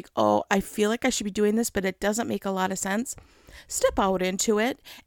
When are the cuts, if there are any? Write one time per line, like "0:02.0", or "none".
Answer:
none

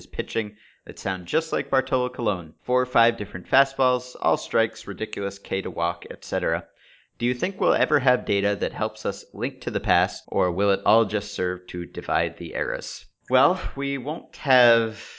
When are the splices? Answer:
none

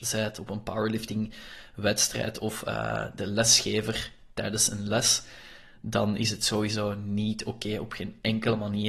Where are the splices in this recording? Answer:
none

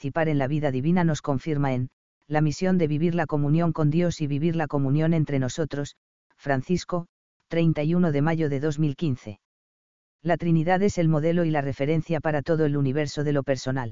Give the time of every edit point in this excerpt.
0:06.2

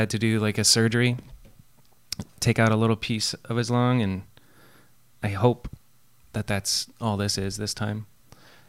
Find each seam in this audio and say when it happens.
none

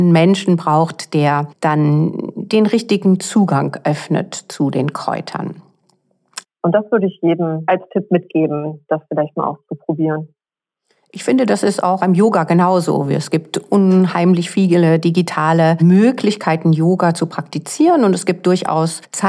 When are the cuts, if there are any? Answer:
0:06.4

